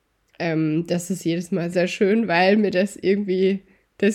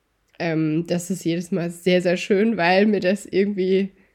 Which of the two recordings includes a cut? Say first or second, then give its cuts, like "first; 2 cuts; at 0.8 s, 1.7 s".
first; 1 cut; at 1.7 s